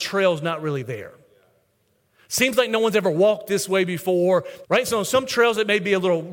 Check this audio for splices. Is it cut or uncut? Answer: cut